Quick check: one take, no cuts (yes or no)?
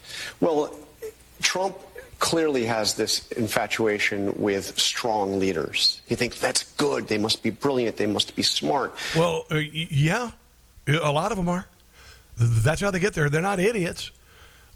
yes